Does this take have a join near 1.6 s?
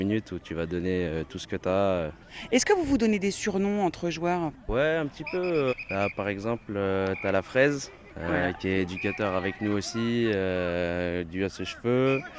no; 0 cuts

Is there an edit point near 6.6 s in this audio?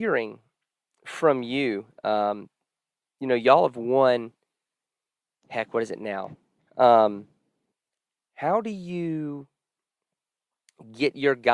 yes; 1 cut; at 6.6 s

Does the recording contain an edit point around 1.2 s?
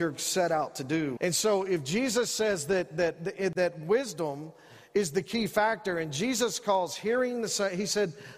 yes; 1 cut; at 1.2 s

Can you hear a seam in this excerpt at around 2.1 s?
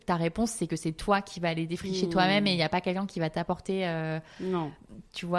no; 0 cuts

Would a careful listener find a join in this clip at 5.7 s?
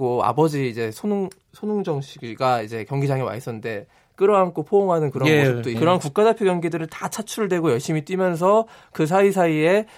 yes; 1 cut; at 5.7 s

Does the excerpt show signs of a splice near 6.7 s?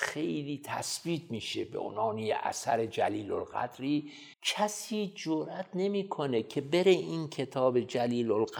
no; 1 cut; at 4.3 s

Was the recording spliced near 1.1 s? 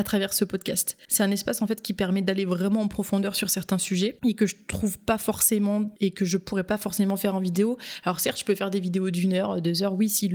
yes; 1 cut; at 1.1 s

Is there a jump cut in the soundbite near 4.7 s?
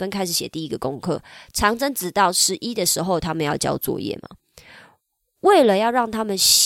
no; 0 cuts

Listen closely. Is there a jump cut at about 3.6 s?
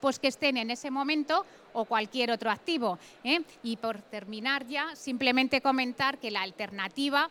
yes; 1 cut; at 3.6 s

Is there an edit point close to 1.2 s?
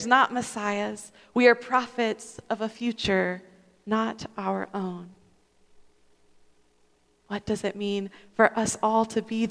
no; 0 cuts

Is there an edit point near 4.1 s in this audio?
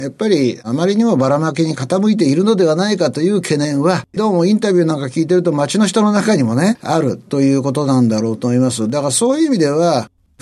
yes; 1 cut; at 4.1 s

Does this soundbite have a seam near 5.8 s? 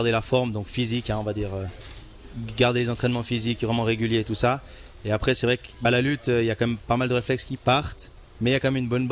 no; 0 cuts

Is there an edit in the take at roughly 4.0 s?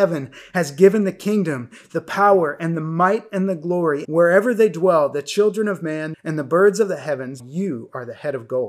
yes; 3 cuts; at 4.0 s, 6.1 s, 7.4 s

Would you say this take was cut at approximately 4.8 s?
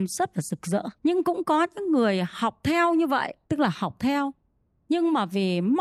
no; 2 cuts; at 0.9 s, 3.4 s

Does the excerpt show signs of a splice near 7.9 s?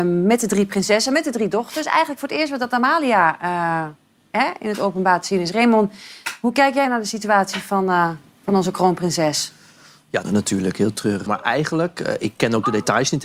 no; 2 cuts; at 10.2 s, 11.3 s

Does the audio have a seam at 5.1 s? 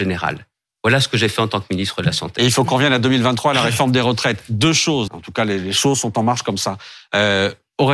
yes; 1 cut; at 5.1 s

